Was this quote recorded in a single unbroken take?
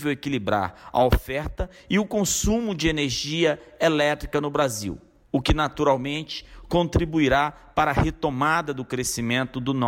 no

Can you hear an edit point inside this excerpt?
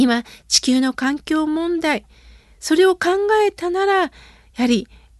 no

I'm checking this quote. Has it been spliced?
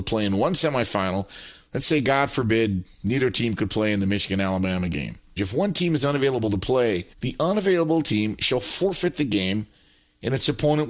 yes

